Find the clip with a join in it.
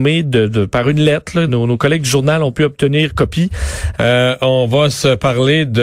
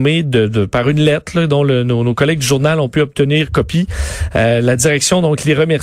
first; 2 cuts; at 1.5 s, 3.9 s

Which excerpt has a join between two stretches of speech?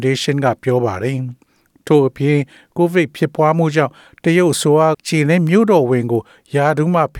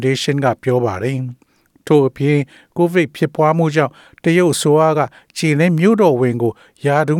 first; 1 cut; at 4.9 s

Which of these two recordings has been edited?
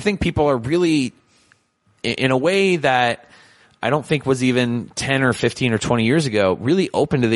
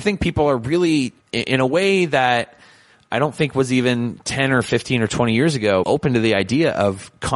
second; 2 cuts; at 1.2 s, 5.8 s

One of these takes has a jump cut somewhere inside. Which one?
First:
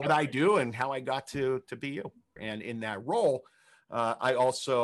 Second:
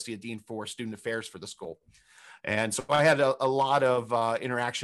first; 1 cut; at 2.4 s

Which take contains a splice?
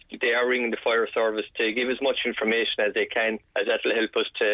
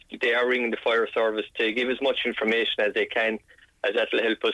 first; 1 cut; at 3.5 s

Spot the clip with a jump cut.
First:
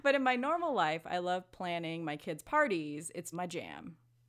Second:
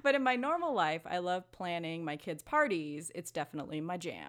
first; 1 cut; at 3.3 s

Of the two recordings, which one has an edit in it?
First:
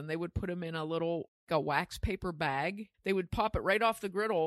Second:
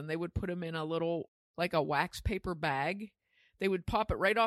first; 2 cuts; at 1.5 s, 2.9 s

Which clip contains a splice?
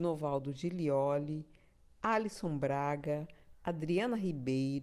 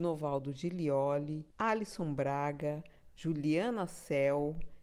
second; 2 cuts; at 1.5 s, 3.1 s

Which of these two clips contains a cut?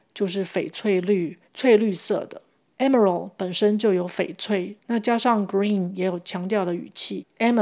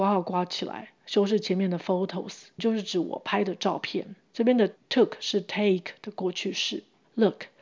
first; 1 cut; at 4.8 s

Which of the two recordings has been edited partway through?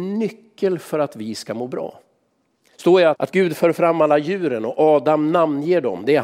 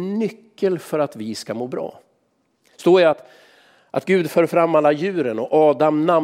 first; 1 cut; at 3.1 s

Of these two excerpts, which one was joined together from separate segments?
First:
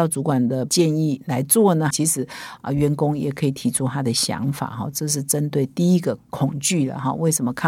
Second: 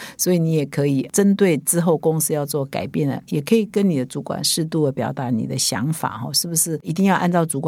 first; 1 cut; at 1.9 s

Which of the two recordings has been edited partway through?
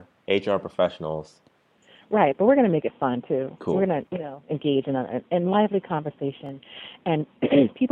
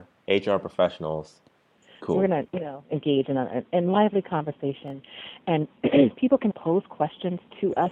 second; 2 cuts; at 2.0 s, 6.5 s

